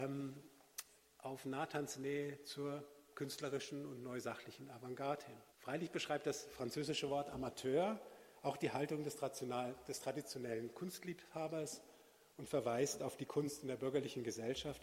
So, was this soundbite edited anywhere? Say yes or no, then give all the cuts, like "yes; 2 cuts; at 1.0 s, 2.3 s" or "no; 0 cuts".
yes; 1 cut; at 5.5 s